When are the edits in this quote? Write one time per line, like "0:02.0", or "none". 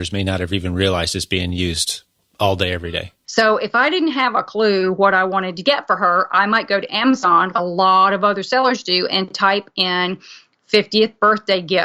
0:03.2
0:07.5